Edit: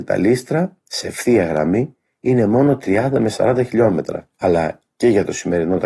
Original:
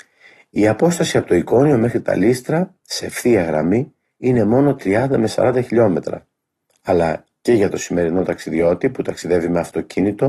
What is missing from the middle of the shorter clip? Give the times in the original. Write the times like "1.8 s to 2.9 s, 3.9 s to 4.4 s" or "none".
6.3 s to 6.8 s